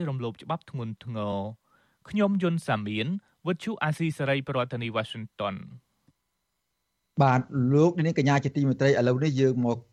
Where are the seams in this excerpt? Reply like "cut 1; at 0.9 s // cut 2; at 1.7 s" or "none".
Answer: none